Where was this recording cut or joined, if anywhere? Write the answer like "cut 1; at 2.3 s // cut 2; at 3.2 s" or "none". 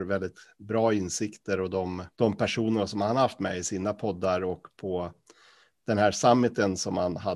cut 1; at 2.1 s